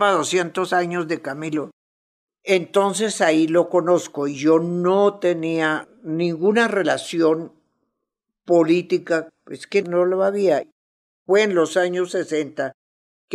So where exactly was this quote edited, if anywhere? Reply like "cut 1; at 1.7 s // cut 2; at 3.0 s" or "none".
none